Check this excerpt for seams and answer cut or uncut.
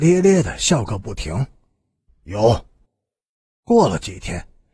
cut